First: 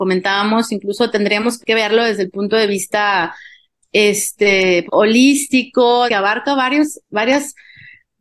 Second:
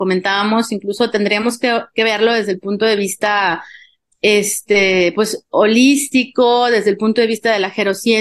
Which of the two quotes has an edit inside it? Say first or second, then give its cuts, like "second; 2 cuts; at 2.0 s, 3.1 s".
first; 3 cuts; at 1.6 s, 4.9 s, 6.1 s